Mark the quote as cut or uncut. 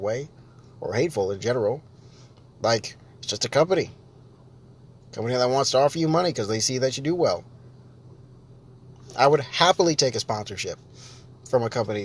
uncut